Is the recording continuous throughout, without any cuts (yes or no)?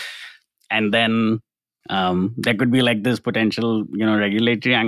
no